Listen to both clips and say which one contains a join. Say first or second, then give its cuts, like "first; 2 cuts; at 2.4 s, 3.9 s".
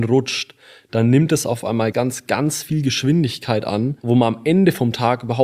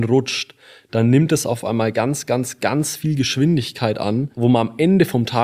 first; 1 cut; at 1.9 s